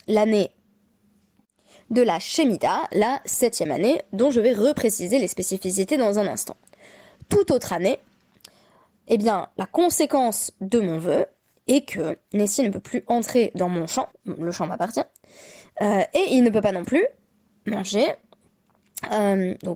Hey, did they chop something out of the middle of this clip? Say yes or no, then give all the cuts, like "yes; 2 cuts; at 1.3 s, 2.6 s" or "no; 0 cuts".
yes; 1 cut; at 14.1 s